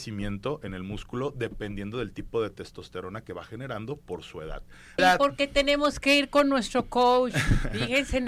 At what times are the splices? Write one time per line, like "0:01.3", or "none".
0:05.0